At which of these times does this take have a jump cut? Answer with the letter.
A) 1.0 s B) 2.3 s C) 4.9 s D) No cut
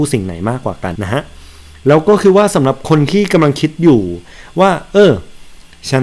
A